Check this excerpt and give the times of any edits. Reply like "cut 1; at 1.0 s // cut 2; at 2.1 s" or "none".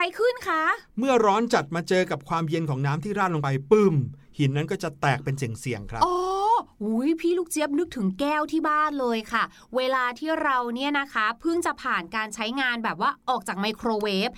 none